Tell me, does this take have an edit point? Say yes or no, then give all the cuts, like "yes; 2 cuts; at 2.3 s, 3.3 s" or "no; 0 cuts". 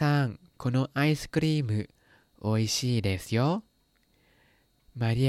no; 0 cuts